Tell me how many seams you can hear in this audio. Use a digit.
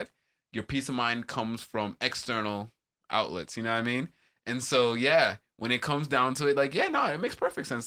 0